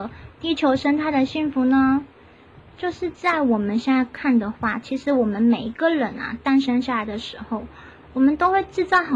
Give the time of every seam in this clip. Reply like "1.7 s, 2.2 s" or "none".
none